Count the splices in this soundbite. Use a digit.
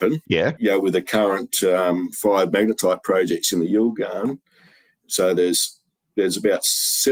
1